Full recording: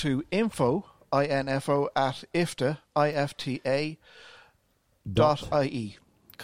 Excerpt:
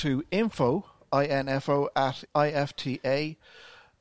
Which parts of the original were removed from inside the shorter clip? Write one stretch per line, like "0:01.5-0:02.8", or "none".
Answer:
0:02.3-0:02.9